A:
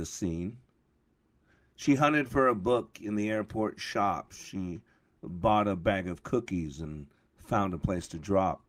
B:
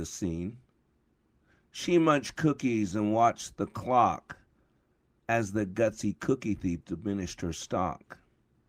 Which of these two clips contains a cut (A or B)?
A